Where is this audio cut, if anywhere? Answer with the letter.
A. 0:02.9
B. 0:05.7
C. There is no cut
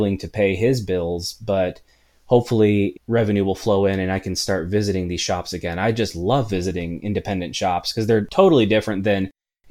A